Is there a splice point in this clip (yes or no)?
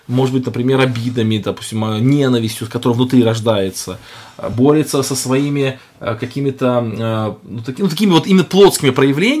no